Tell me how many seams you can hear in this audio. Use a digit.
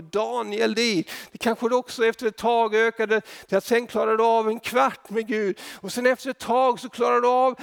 1